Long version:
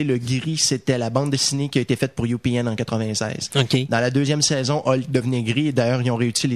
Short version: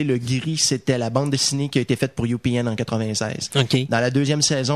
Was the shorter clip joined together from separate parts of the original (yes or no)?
no